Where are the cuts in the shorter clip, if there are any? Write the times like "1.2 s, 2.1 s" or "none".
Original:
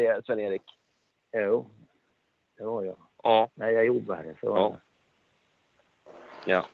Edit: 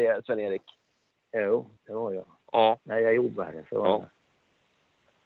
1.8 s